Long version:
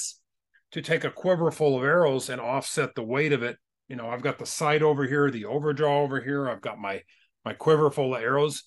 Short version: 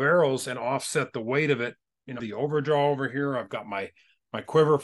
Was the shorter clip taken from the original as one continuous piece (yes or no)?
no